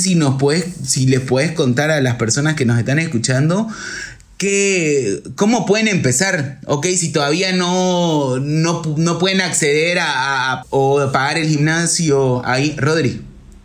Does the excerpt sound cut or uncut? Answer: cut